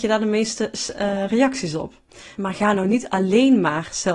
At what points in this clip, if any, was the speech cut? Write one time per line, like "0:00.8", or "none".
0:02.4